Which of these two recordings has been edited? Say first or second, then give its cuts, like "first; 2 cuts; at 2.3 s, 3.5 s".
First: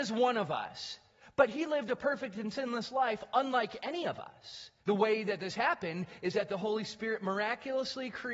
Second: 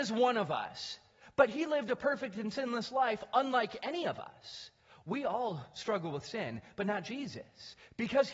first; 1 cut; at 4.8 s